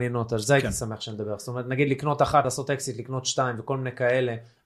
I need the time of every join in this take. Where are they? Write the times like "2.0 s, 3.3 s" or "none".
none